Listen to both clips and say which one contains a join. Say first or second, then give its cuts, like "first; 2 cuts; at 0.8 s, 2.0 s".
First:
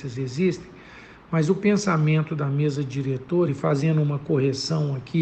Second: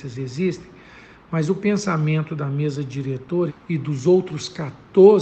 second; 1 cut; at 3.5 s